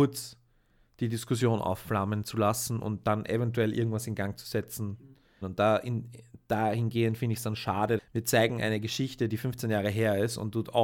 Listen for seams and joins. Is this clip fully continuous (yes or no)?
no